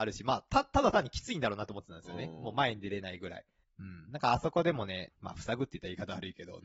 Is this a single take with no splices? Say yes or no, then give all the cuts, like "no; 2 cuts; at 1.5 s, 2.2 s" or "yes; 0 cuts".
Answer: no; 2 cuts; at 3.6 s, 5.1 s